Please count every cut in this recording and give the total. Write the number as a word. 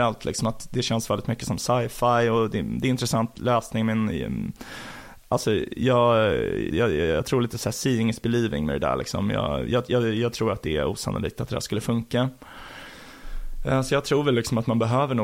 one